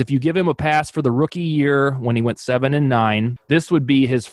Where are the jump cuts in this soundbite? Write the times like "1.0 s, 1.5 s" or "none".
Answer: 3.4 s